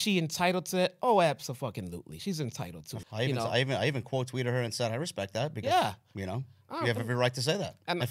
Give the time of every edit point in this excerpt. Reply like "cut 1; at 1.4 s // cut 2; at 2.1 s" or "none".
cut 1; at 3.0 s